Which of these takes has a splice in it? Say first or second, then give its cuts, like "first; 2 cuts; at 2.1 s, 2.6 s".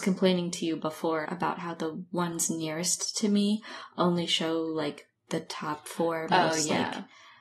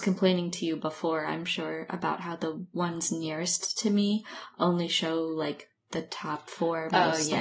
first; 1 cut; at 1.2 s